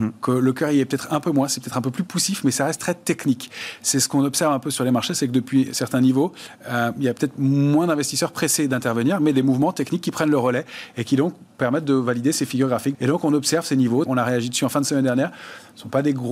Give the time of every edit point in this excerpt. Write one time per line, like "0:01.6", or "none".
0:12.9
0:14.1